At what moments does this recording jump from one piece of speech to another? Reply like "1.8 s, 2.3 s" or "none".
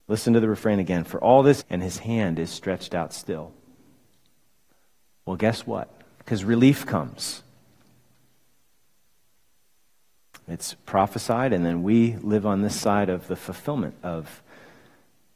1.6 s, 6.2 s